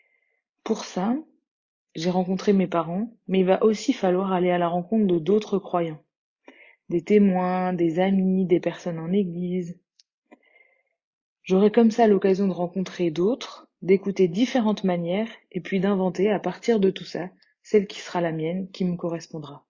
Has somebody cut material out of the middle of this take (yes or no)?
no